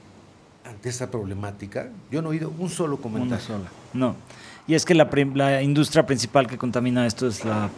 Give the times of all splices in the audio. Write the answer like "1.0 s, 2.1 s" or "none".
none